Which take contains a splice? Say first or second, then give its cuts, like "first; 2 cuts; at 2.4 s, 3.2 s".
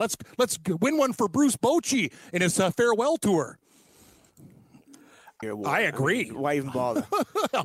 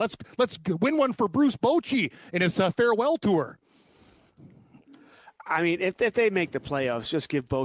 first; 1 cut; at 5.4 s